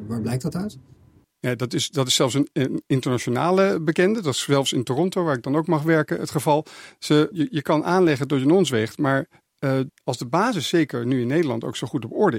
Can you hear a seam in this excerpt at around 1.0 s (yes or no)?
no